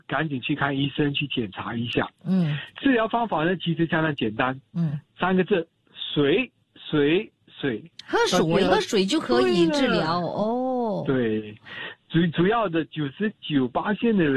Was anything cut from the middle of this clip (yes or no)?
yes